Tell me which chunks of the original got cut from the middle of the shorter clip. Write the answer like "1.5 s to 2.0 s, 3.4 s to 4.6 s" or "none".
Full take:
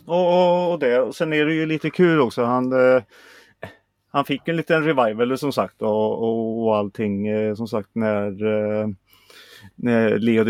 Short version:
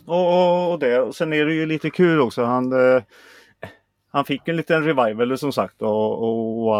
none

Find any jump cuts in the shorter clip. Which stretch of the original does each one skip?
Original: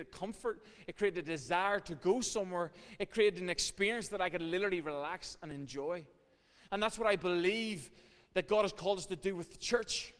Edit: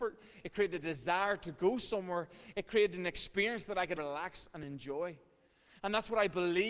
4.4 s to 4.8 s

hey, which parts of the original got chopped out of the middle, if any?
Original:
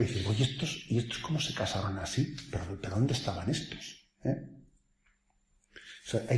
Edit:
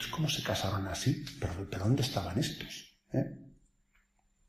none

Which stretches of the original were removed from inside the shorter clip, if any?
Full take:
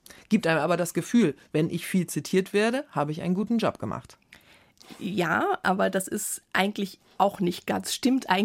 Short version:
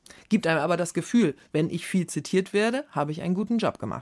none

